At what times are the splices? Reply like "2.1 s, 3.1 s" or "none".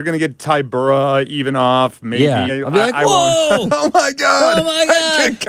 2.5 s